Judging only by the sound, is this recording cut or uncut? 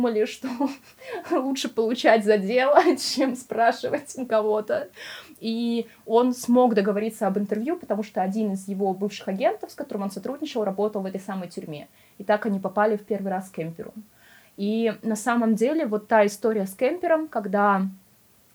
uncut